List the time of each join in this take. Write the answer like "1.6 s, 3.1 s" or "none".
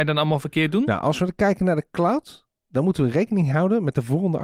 none